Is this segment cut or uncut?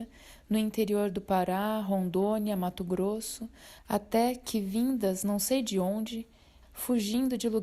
cut